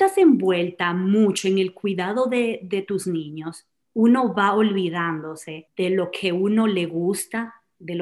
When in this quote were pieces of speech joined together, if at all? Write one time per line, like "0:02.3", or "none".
none